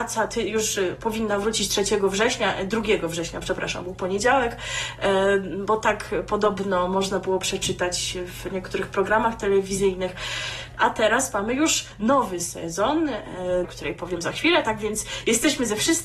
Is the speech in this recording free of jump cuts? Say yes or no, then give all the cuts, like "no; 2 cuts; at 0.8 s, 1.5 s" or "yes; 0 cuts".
no; 2 cuts; at 10.8 s, 13.6 s